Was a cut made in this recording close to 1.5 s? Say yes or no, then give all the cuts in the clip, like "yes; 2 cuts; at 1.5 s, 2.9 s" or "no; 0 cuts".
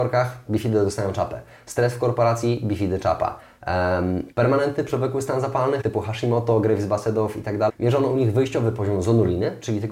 no; 3 cuts; at 4.3 s, 5.8 s, 7.7 s